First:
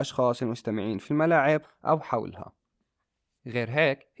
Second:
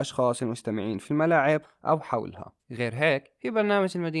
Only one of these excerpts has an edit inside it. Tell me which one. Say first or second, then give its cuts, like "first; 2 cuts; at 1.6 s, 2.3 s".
second; 1 cut; at 2.6 s